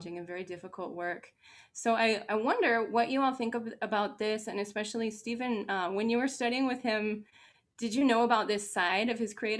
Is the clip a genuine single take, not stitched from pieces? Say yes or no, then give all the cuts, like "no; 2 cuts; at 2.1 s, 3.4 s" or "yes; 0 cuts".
yes; 0 cuts